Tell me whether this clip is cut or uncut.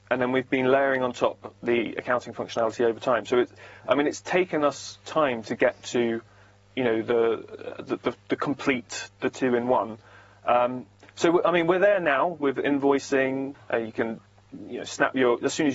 cut